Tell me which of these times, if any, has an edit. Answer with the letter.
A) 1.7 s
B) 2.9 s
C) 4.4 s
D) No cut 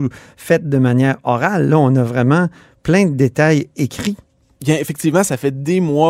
D